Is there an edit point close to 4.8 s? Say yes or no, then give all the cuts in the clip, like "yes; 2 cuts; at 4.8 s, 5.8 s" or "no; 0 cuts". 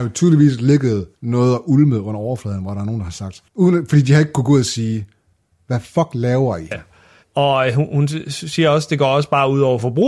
no; 3 cuts; at 1.2 s, 3.5 s, 6.7 s